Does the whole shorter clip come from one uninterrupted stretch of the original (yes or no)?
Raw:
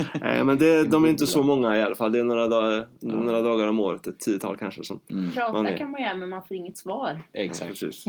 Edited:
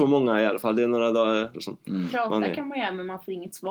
no